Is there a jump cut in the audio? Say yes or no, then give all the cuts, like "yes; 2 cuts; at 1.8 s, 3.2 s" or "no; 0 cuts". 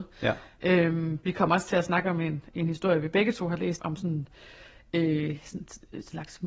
yes; 1 cut; at 3.8 s